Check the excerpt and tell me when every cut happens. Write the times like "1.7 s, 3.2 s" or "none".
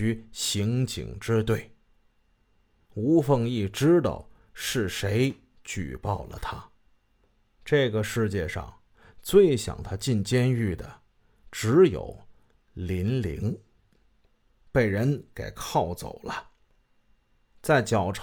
14.7 s